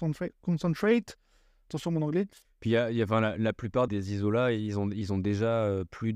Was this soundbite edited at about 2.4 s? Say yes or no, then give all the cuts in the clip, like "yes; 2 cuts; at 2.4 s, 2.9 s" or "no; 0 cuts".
yes; 2 cuts; at 2.4 s, 3.9 s